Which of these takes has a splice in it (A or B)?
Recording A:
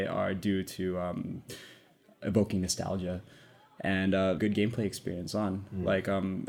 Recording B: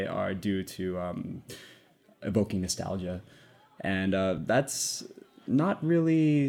A